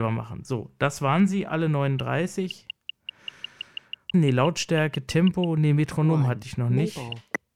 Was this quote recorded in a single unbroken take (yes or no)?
no